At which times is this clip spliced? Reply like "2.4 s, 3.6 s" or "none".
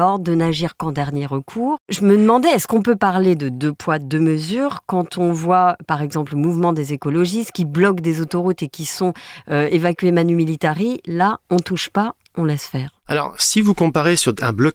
none